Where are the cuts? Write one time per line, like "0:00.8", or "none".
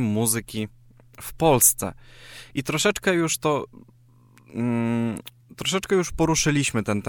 none